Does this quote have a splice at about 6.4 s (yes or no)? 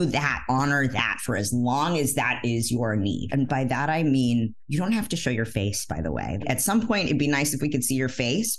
yes